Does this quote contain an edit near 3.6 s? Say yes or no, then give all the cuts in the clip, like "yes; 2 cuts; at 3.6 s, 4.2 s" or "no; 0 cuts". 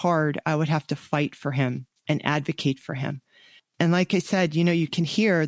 yes; 1 cut; at 3.6 s